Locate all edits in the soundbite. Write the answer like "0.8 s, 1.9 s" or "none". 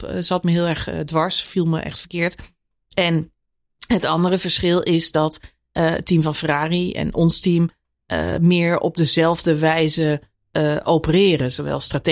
none